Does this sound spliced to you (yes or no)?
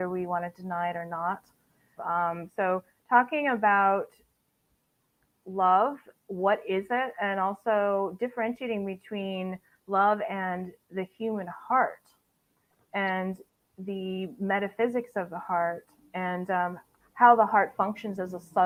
yes